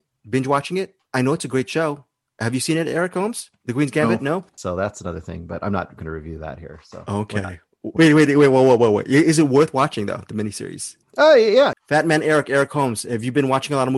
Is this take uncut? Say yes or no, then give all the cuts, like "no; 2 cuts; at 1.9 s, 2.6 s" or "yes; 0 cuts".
no; 3 cuts; at 4.6 s, 8.0 s, 11.7 s